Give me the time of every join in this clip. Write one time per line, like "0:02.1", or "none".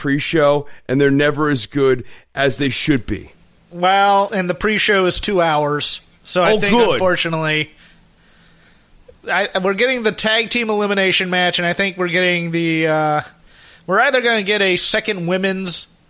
0:04.3

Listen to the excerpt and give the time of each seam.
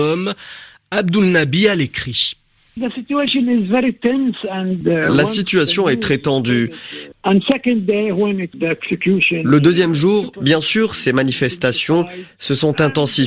0:07.1
0:10.3

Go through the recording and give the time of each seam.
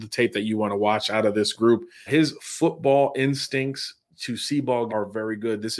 0:02.1
0:04.9

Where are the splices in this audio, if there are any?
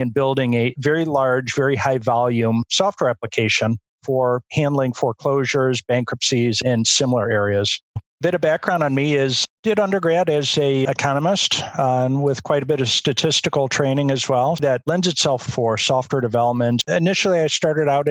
0:08.0
0:15.5

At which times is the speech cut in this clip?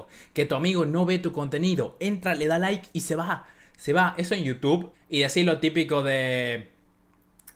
0:04.9

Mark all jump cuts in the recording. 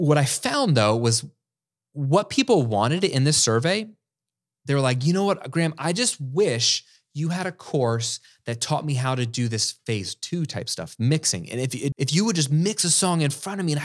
0:11.9

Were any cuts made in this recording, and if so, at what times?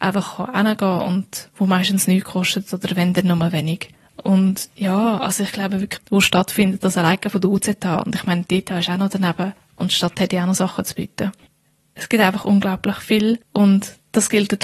0:06.0

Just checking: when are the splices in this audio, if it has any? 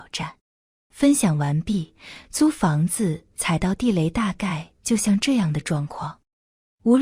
0:00.9

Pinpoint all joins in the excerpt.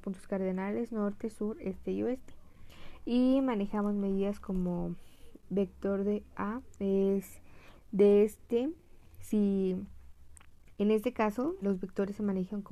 0:09.2
0:11.6

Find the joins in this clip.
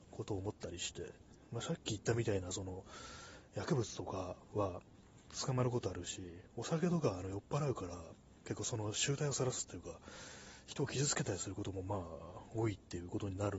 none

